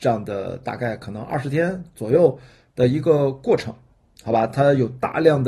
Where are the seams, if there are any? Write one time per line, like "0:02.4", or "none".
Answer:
none